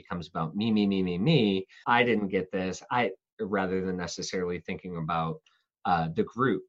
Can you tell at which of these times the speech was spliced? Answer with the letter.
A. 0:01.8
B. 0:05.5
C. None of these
A